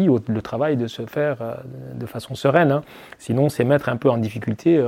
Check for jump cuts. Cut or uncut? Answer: uncut